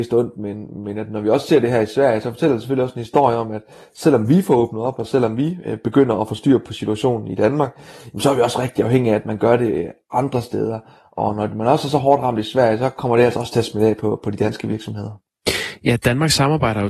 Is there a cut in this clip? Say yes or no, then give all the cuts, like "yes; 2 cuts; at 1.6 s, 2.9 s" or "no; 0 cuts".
no; 0 cuts